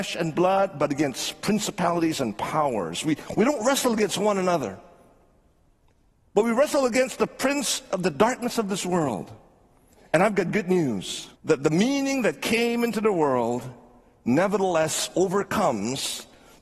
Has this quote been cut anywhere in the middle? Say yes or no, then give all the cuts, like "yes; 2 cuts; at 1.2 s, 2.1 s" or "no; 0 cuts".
yes; 1 cut; at 11.4 s